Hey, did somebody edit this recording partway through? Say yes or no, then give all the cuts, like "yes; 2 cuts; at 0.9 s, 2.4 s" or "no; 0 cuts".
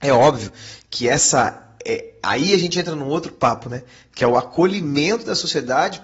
no; 0 cuts